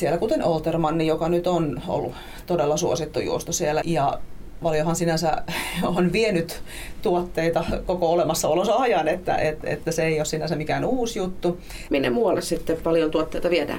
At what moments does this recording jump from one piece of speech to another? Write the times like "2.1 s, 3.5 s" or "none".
3.8 s, 11.9 s